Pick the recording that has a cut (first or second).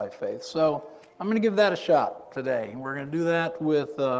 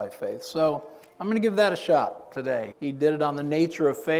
second